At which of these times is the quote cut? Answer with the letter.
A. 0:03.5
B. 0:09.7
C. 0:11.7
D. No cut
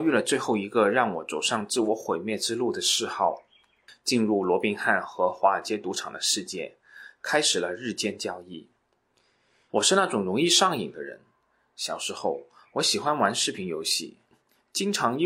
B